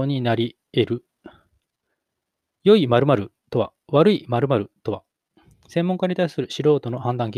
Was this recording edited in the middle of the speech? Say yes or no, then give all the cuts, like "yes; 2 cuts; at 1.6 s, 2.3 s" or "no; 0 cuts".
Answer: no; 0 cuts